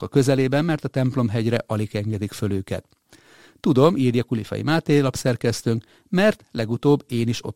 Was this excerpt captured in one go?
yes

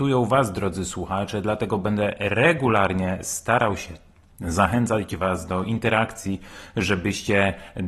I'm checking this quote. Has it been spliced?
no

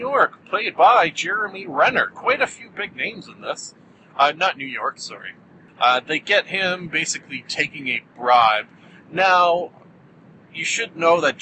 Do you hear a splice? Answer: yes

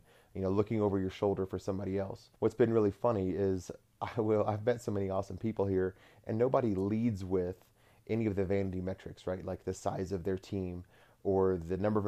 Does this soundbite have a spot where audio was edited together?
yes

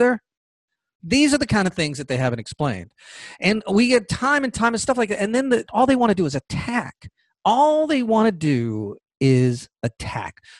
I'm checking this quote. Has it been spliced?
yes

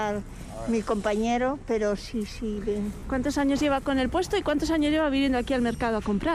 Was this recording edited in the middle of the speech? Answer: no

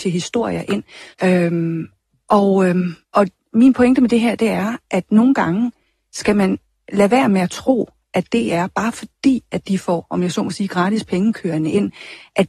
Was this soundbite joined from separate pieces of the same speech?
yes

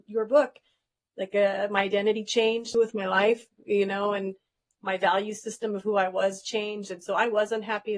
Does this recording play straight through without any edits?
no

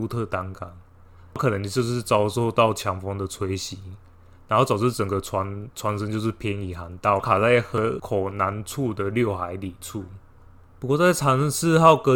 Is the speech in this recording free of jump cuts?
yes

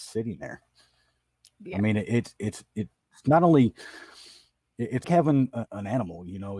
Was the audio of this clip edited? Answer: yes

